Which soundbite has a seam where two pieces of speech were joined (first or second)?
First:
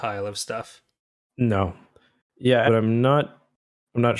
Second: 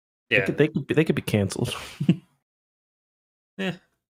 first